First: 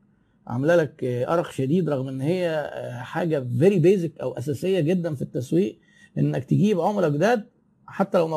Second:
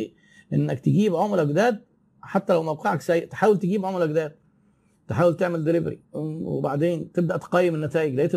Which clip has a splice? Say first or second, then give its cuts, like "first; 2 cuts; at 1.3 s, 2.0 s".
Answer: second; 1 cut; at 6.0 s